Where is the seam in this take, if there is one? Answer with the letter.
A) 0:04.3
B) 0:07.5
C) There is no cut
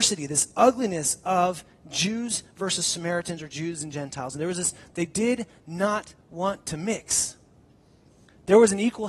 C